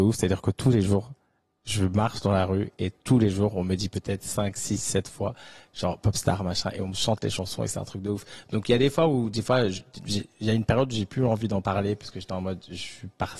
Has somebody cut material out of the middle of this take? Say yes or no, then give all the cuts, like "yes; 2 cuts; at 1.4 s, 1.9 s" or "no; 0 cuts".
no; 0 cuts